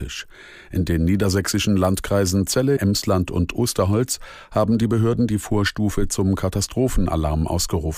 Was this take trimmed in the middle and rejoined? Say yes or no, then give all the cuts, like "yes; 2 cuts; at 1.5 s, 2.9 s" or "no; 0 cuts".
yes; 1 cut; at 2.8 s